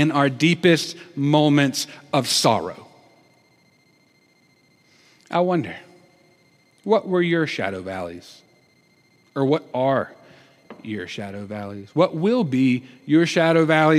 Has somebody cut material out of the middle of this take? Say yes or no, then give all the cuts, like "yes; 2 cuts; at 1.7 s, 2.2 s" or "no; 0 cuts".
no; 0 cuts